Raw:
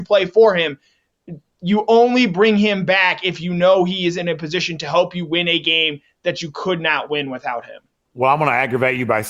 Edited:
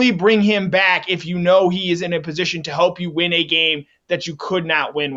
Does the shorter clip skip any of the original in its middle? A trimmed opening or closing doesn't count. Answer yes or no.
no